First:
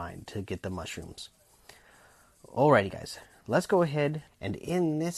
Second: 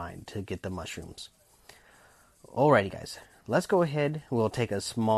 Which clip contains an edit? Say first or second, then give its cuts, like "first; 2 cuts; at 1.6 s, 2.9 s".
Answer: first; 1 cut; at 4.3 s